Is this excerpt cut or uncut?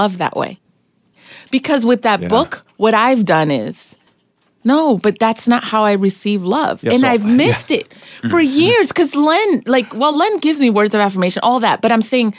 uncut